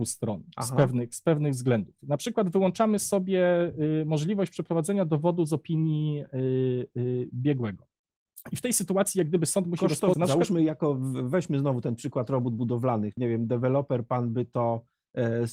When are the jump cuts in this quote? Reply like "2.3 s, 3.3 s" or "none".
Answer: 10.1 s, 13.2 s

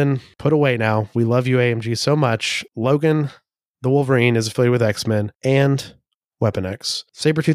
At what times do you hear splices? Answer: none

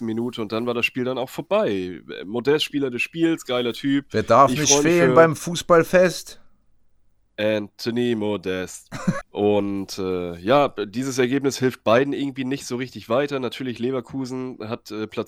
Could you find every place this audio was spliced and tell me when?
9.2 s

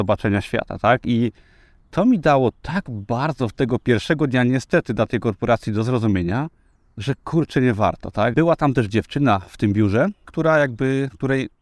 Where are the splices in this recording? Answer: 8.3 s, 10.2 s

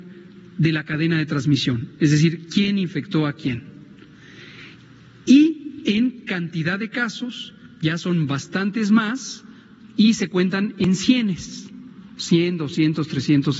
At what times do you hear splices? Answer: none

